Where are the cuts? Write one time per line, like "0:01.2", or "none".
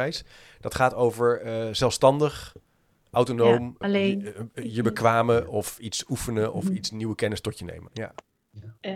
0:03.8
0:07.9